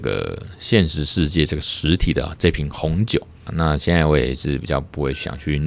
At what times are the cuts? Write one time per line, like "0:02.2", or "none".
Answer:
0:03.5